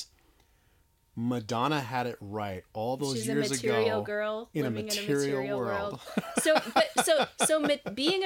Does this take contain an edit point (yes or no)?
no